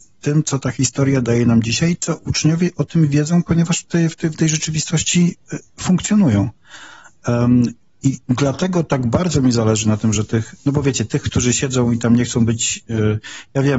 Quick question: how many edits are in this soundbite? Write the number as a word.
one